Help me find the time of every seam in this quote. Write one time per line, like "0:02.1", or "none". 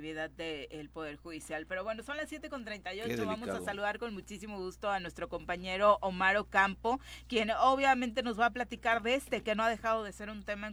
none